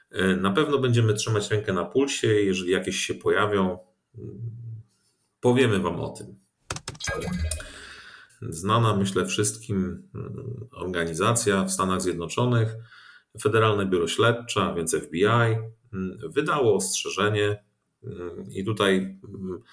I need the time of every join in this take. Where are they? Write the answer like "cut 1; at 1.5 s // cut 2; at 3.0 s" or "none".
cut 1; at 8.3 s